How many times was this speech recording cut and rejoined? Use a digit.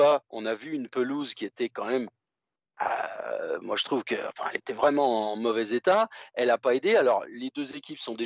0